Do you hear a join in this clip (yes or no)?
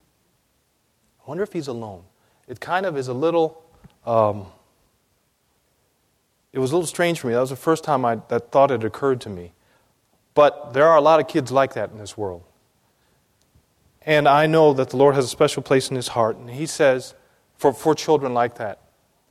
no